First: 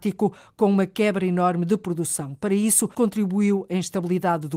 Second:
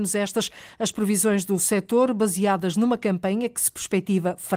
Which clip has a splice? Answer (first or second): first